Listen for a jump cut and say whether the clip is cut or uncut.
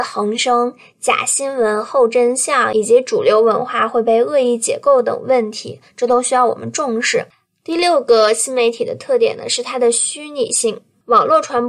uncut